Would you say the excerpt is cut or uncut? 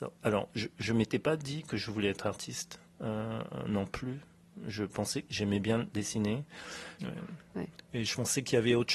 cut